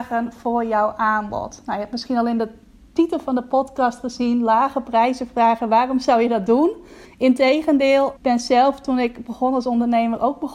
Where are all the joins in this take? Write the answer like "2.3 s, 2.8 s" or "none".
7.0 s, 8.2 s